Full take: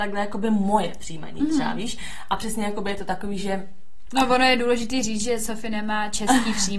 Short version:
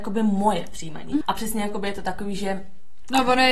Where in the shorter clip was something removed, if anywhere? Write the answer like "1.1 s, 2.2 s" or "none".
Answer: 1.2 s